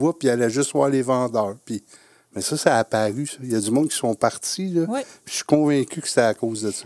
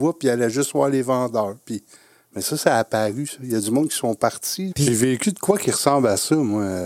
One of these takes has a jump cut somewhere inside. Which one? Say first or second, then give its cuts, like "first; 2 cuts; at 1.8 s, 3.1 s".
second; 1 cut; at 4.7 s